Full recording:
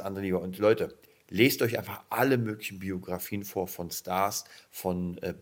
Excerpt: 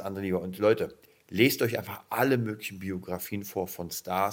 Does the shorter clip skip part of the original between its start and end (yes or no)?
no